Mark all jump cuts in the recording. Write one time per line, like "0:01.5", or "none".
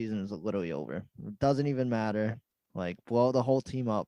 none